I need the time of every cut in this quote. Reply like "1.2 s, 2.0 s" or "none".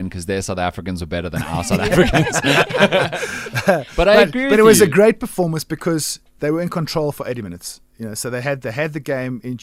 none